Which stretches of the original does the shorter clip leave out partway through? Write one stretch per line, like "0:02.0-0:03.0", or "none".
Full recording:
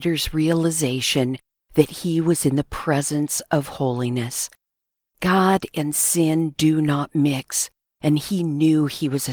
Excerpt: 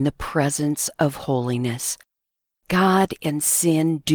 none